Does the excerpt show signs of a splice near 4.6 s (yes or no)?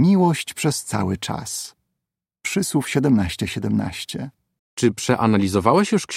yes